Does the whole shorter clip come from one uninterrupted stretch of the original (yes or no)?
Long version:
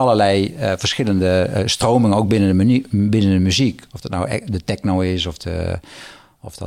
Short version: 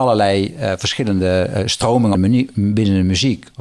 no